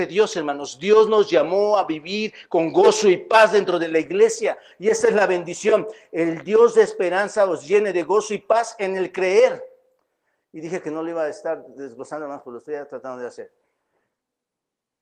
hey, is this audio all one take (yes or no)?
yes